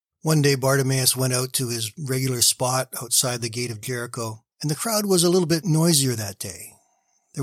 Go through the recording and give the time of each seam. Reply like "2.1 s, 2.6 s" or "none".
4.5 s